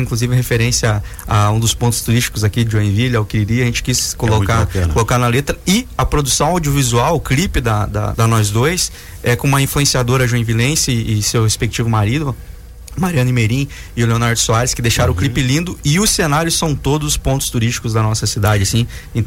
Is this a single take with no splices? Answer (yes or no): no